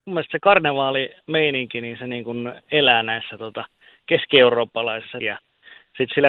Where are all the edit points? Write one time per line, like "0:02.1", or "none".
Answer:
0:05.2